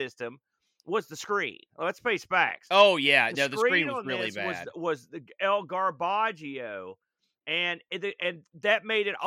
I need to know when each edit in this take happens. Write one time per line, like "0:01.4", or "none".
none